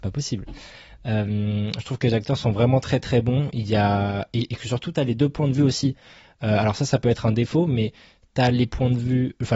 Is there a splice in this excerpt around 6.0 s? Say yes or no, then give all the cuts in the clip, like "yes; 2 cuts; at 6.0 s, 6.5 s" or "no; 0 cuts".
no; 0 cuts